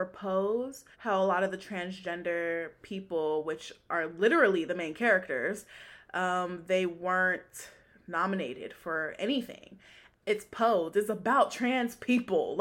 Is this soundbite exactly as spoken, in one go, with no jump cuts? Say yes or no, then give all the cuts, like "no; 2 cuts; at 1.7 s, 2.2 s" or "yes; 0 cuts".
no; 2 cuts; at 0.9 s, 10.1 s